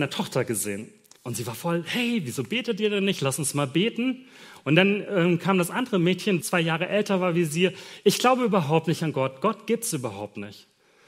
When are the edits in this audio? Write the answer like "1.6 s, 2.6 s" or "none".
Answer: 1.2 s, 6.4 s